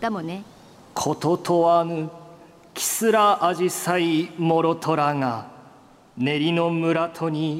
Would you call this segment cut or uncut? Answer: uncut